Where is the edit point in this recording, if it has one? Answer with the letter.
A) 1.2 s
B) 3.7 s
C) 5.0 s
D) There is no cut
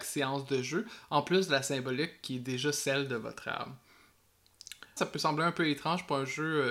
C